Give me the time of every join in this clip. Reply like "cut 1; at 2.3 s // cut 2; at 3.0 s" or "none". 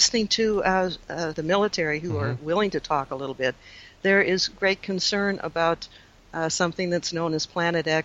cut 1; at 1.3 s // cut 2; at 4.5 s